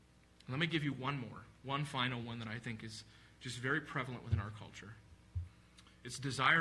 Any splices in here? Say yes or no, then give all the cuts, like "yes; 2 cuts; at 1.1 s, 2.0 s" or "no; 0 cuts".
no; 0 cuts